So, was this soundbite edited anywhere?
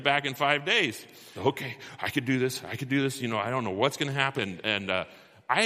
yes; 2 cuts; at 1.4 s, 4.4 s

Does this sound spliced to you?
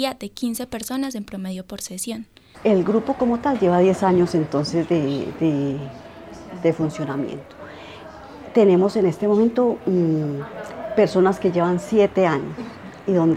yes; 1 cut; at 2.5 s

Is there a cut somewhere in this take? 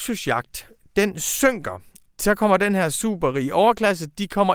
yes; 1 cut; at 2.1 s

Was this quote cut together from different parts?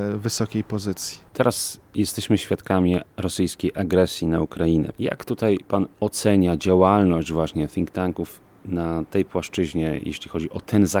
no; 0 cuts

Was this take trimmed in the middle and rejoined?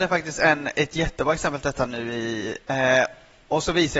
yes; 1 cut; at 2.7 s

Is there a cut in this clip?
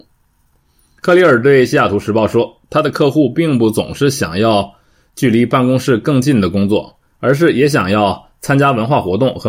yes; 1 cut; at 1.0 s

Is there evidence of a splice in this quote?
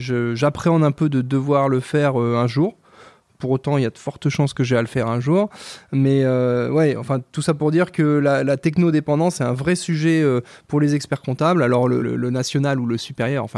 yes; 1 cut; at 12.0 s

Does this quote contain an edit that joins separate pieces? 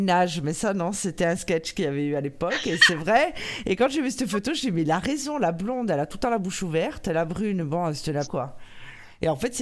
yes; 1 cut; at 8.2 s

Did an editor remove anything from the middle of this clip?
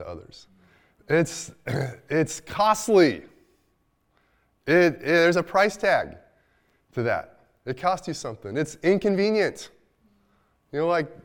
no; 0 cuts

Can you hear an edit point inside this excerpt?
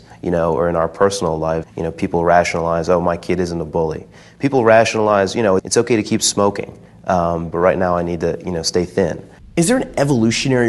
yes; 3 cuts; at 1.6 s, 5.6 s, 7.5 s

